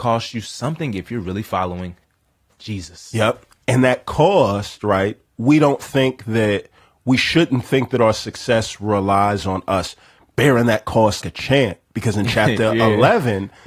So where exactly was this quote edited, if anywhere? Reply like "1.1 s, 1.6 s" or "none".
11.2 s